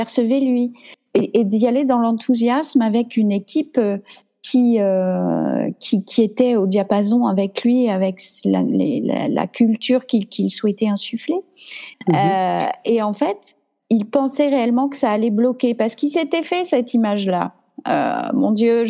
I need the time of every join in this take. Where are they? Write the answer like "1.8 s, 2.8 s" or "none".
11.9 s, 13.8 s